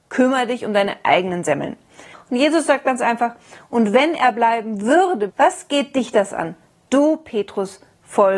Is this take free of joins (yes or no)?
no